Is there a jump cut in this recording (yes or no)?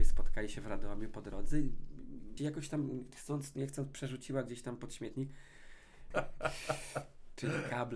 yes